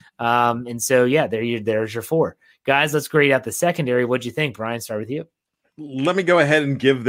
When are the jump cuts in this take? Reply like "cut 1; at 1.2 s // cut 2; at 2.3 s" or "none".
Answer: none